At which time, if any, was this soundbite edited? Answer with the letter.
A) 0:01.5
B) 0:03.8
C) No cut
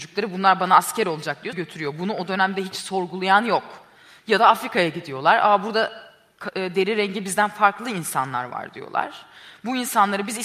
A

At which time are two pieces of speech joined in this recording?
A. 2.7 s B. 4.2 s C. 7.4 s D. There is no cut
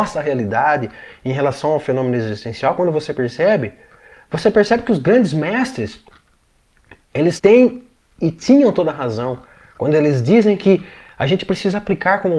C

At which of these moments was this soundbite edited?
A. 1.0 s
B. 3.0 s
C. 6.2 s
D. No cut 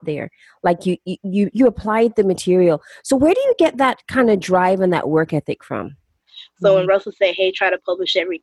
C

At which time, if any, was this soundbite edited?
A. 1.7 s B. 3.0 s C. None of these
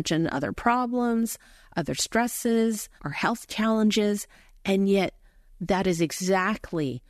B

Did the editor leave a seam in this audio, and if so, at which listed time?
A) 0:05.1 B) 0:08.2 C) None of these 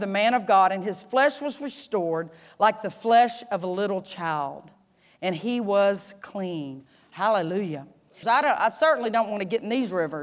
B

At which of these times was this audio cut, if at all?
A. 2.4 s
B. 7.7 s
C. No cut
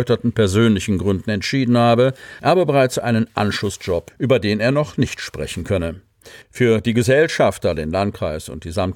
A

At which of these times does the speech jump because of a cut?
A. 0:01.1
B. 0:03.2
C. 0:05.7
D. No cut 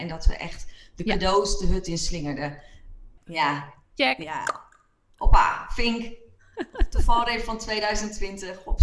B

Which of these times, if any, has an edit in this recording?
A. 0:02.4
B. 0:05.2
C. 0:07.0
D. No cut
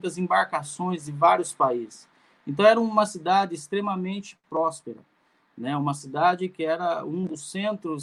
D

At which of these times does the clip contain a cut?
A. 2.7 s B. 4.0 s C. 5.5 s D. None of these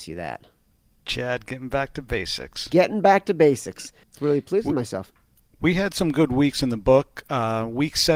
B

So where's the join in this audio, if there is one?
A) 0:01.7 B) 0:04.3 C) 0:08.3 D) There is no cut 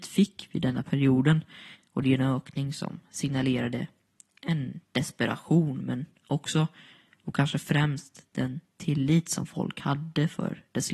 A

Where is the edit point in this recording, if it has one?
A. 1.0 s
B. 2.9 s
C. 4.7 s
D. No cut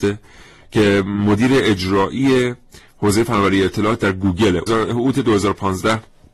C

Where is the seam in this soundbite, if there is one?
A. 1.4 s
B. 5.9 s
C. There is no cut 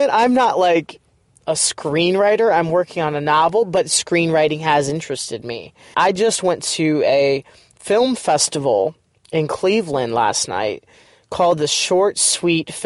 B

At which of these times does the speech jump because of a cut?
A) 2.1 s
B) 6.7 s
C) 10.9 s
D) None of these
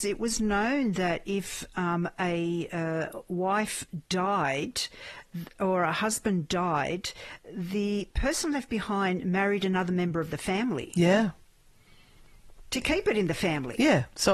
D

